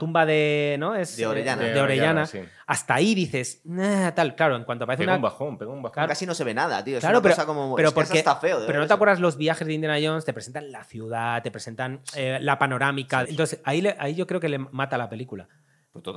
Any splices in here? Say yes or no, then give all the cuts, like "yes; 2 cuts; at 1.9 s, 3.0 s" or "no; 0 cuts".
yes; 2 cuts; at 6.1 s, 13.2 s